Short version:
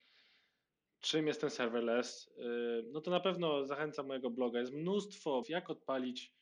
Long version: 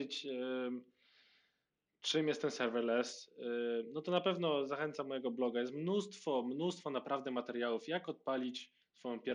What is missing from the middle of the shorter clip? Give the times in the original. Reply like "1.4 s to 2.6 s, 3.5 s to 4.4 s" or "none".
6.4 s to 7.8 s